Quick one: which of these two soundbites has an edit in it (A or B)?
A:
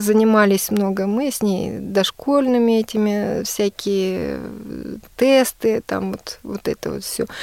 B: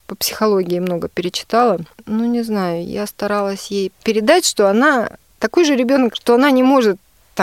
B